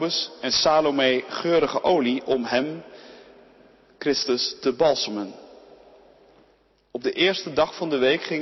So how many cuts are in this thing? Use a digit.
0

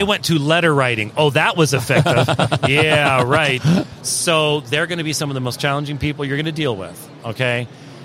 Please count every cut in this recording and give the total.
1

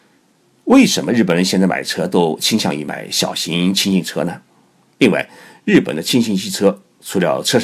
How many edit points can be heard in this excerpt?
1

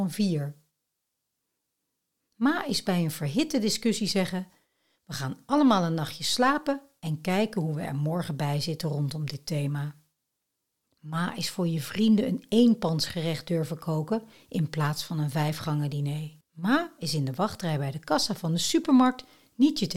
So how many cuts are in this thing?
2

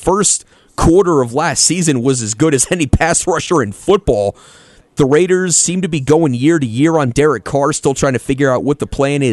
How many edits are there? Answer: 1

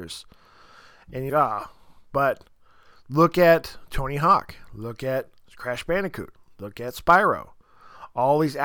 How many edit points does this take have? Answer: 1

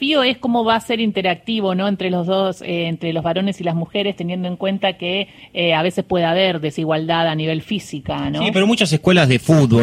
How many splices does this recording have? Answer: 0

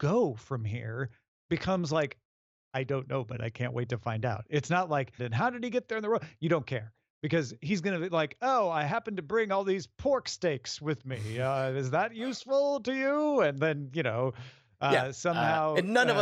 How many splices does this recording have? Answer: 1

